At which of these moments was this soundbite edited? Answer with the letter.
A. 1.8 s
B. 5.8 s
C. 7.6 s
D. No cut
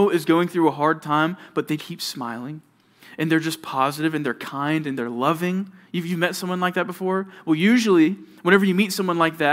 A